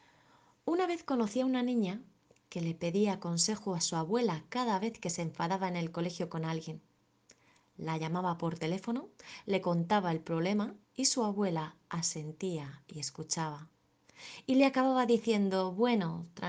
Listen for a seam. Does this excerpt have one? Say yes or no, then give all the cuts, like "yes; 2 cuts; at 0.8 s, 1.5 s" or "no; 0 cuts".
yes; 1 cut; at 10.8 s